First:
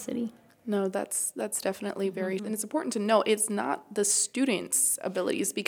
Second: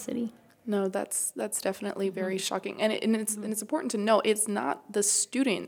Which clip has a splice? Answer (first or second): first